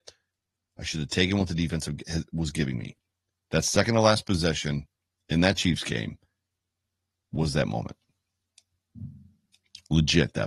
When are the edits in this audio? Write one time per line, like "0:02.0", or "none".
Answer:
none